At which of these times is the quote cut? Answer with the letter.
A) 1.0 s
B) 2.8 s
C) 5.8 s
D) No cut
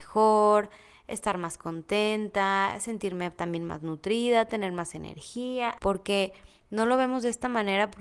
C